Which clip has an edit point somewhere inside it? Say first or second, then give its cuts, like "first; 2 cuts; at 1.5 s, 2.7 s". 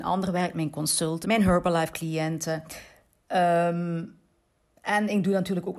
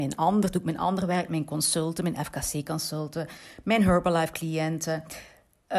first; 1 cut; at 1.2 s